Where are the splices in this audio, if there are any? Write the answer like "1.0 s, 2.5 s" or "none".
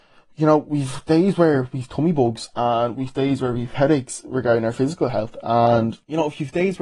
none

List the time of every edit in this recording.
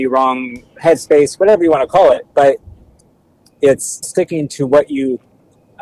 2.3 s, 4.0 s

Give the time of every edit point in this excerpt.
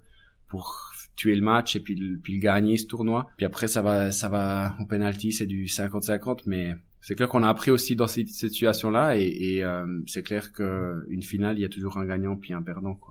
none

